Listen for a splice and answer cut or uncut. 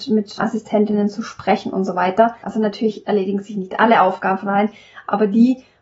cut